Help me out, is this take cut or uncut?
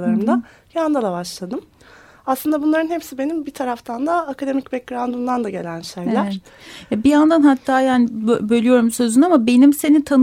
uncut